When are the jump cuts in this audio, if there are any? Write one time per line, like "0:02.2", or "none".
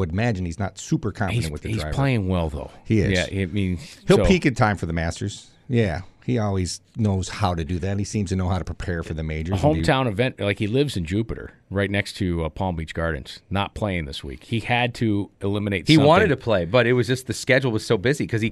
none

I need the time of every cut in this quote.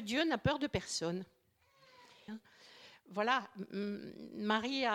0:02.3

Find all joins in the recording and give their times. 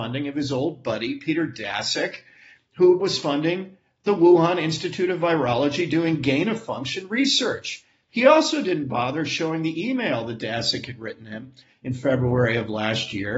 0:08.1

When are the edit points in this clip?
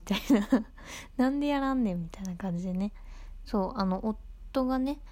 0:03.5

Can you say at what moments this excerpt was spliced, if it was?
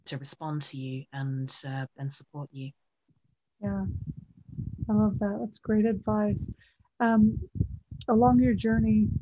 none

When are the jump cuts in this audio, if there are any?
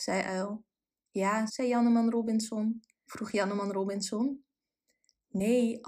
0:01.5
0:03.1

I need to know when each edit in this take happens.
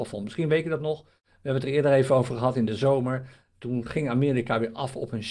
none

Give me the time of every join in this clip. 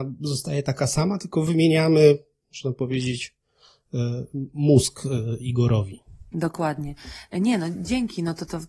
none

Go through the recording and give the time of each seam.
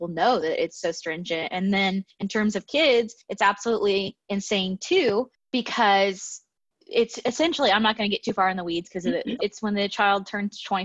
0:09.4

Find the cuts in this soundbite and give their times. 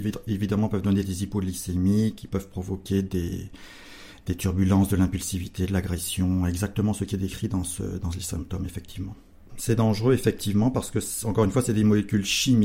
0:09.5

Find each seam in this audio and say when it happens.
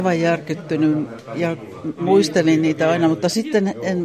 none

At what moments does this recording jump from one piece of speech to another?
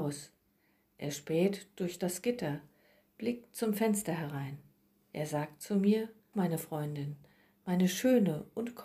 0:06.3

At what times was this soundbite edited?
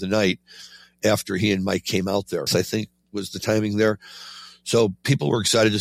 0:02.5

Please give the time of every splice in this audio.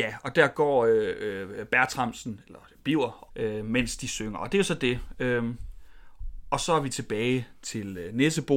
0:03.3

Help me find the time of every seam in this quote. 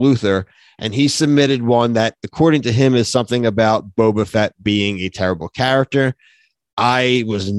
none

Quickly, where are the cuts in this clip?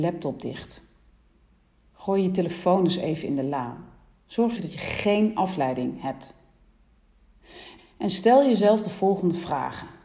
0:04.6
0:07.8

